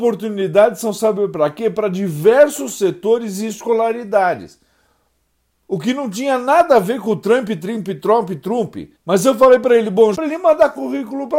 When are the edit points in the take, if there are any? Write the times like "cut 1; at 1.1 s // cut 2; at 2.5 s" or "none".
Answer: cut 1; at 7.6 s // cut 2; at 9.0 s // cut 3; at 10.1 s